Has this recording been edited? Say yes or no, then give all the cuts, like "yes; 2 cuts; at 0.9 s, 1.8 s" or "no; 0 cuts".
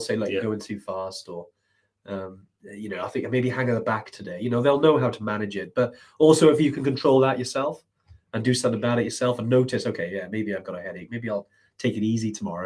no; 0 cuts